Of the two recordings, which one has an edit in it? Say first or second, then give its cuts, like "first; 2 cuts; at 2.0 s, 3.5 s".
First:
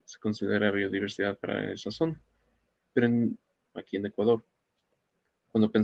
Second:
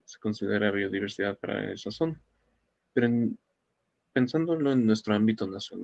first; 1 cut; at 3.6 s